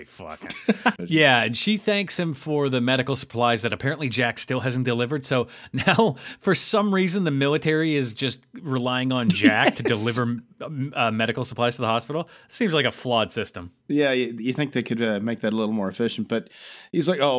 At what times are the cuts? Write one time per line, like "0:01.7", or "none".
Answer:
0:01.0